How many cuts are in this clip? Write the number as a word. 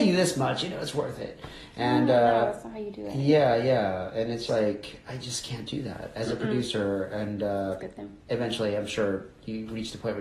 one